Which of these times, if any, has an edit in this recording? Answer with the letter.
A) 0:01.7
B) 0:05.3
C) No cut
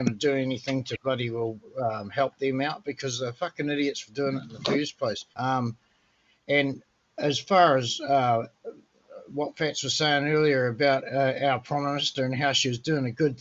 B